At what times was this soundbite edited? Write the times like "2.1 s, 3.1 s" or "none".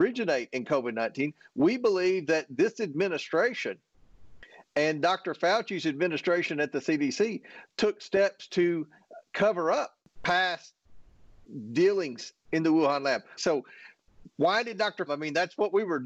13.4 s, 15.1 s